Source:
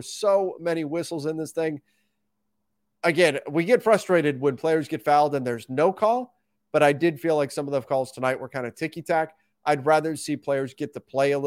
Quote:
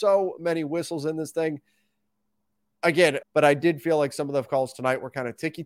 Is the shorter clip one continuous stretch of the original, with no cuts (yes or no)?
no